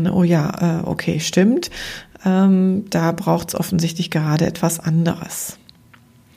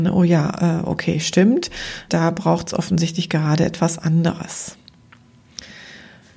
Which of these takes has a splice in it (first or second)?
second